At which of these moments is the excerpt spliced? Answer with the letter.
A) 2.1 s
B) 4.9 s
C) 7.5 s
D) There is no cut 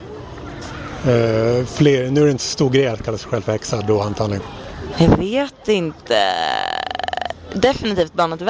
B